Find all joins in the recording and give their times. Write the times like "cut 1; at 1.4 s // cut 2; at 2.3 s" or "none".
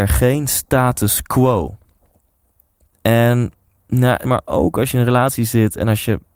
cut 1; at 2.9 s // cut 2; at 4.2 s

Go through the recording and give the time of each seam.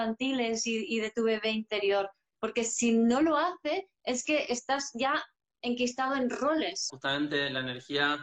cut 1; at 6.9 s

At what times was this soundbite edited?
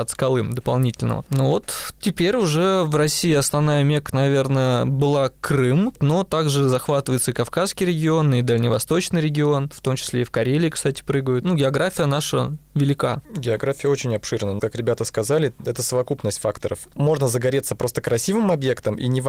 cut 1; at 9.7 s // cut 2; at 14.6 s

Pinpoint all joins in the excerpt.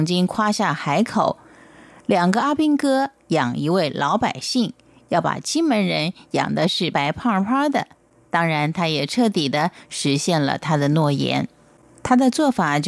cut 1; at 6.9 s

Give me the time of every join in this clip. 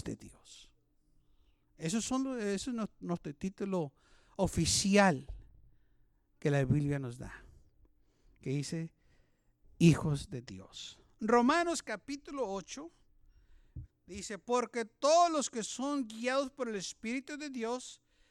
cut 1; at 13.8 s

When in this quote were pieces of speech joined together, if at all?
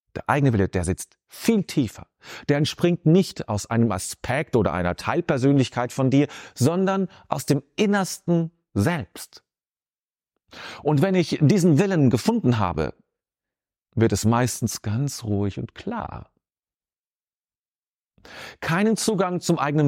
none

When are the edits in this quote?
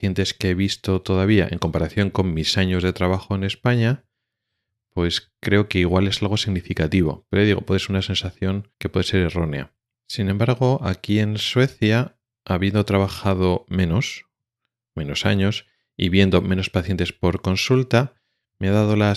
cut 1; at 8.7 s // cut 2; at 9.9 s

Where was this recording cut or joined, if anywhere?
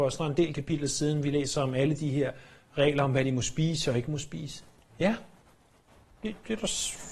cut 1; at 4.9 s

